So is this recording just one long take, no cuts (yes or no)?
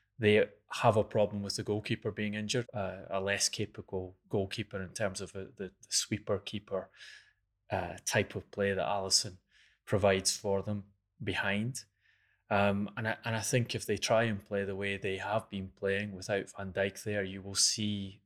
no